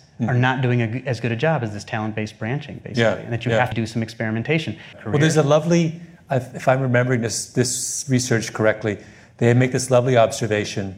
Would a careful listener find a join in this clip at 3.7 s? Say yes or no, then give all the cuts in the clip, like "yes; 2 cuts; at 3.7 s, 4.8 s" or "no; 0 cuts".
yes; 2 cuts; at 3.7 s, 4.9 s